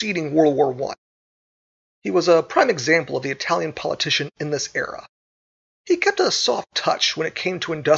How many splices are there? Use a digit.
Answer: 0